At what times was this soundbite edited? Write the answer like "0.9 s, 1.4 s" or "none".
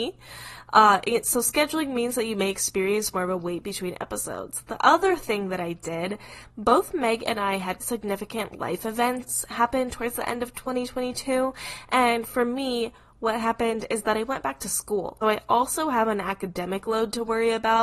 7.8 s, 15.2 s